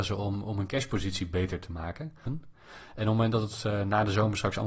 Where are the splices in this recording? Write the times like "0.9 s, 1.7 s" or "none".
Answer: 2.3 s